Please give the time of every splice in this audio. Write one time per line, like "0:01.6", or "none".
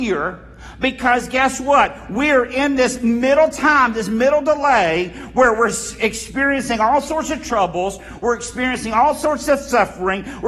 none